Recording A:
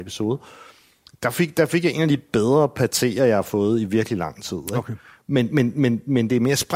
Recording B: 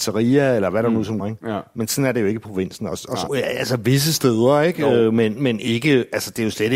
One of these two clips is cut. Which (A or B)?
B